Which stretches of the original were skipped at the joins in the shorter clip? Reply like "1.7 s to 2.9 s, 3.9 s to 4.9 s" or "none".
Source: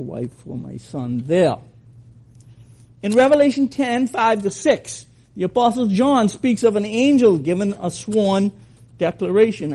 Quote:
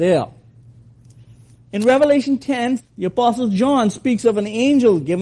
4.1 s to 5.2 s